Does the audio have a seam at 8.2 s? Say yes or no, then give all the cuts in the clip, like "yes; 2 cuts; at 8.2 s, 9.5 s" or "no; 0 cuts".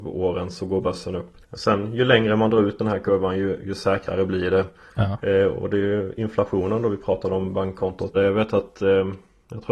yes; 2 cuts; at 1.4 s, 8.2 s